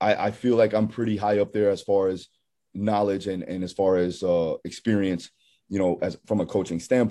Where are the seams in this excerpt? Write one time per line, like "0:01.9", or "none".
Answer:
none